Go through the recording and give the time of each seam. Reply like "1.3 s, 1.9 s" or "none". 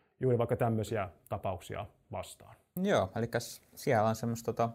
2.8 s